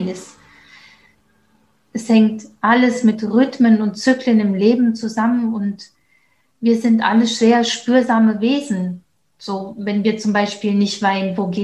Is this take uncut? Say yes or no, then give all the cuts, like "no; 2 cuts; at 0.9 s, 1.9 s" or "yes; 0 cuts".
yes; 0 cuts